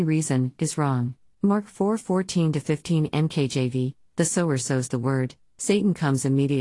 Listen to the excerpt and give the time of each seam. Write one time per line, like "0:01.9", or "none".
0:01.3